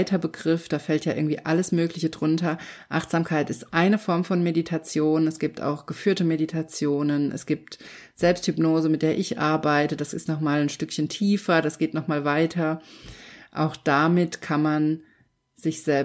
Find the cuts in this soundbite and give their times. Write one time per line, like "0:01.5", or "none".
none